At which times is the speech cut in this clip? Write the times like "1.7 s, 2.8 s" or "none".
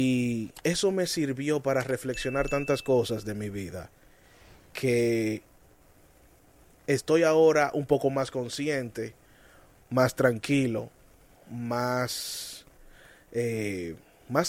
none